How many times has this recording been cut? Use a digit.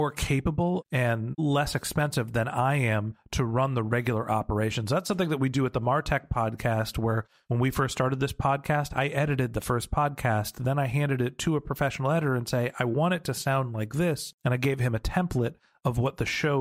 0